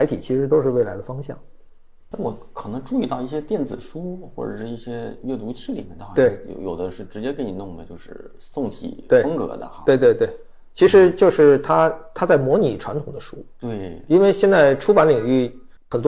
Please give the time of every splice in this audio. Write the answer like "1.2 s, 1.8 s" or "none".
none